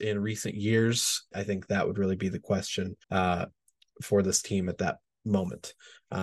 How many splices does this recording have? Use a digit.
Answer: 2